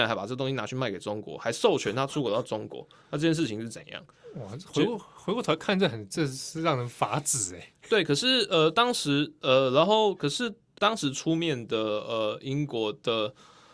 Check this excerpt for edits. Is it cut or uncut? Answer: uncut